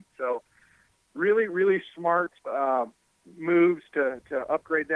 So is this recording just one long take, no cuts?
no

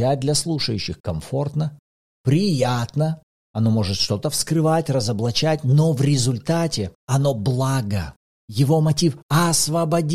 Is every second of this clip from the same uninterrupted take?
yes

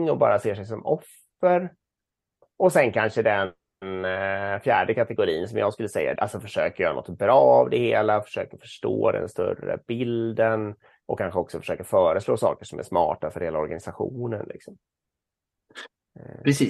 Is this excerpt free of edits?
no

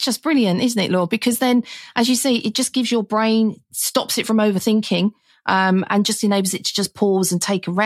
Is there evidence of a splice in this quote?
no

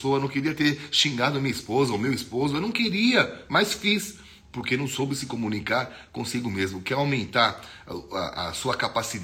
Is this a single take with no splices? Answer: yes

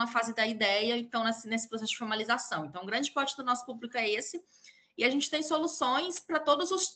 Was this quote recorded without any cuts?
yes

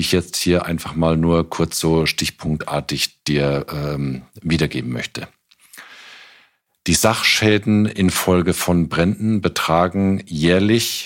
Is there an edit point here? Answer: no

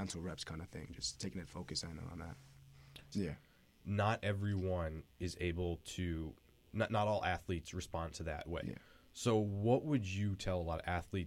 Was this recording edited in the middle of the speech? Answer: yes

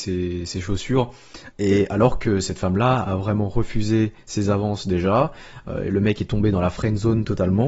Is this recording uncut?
no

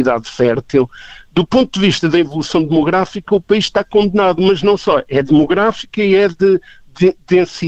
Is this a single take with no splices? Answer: yes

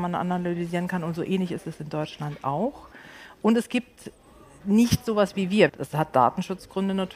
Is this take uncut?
no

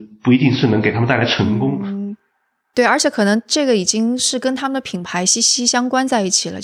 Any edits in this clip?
no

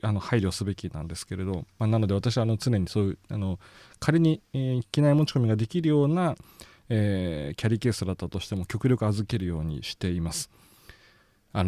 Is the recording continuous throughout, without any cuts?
yes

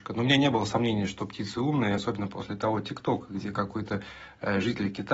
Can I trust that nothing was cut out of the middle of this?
yes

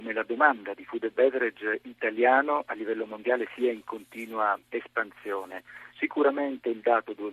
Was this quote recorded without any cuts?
no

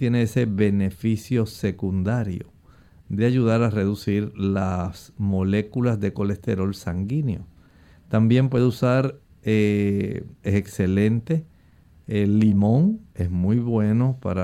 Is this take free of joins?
no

